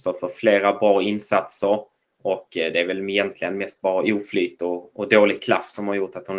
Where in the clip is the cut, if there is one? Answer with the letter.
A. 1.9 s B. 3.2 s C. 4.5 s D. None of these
D